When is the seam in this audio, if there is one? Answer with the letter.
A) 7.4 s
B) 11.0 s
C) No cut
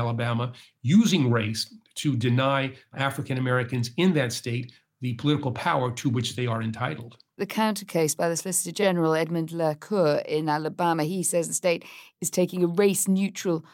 A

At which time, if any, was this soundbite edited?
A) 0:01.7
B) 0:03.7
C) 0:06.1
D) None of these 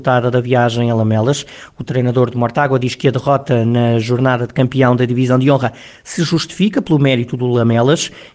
D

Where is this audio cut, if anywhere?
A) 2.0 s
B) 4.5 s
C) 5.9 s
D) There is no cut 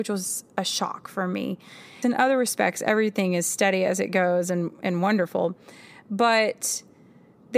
A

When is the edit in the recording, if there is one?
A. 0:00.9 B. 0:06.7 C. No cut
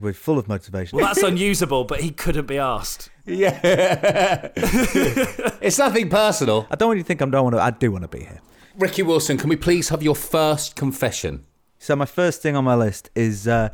A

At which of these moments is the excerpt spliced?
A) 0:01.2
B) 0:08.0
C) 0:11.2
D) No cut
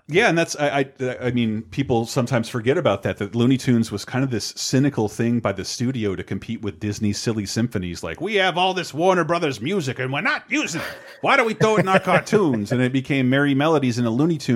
D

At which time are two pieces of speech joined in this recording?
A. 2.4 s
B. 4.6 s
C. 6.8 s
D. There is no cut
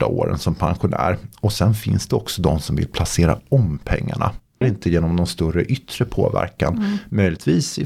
B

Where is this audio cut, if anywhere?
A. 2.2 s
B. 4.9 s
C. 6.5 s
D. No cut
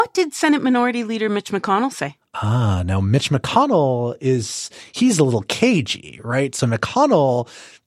D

